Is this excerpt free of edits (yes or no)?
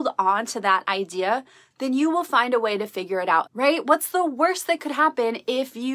no